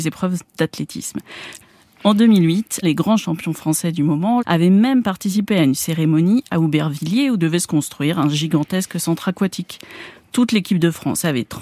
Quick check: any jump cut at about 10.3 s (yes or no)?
no